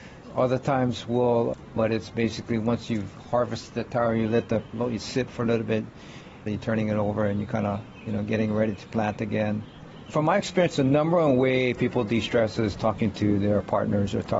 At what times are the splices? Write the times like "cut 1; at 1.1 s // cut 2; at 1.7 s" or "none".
cut 1; at 1.8 s // cut 2; at 6.5 s // cut 3; at 10.0 s